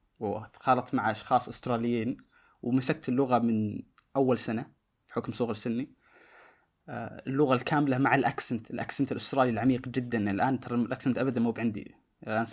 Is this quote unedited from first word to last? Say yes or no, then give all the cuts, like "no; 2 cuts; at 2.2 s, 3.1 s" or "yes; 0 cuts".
yes; 0 cuts